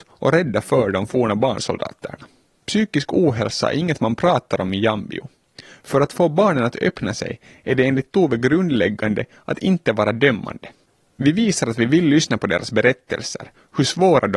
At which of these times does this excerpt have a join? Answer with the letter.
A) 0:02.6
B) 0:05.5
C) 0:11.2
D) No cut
A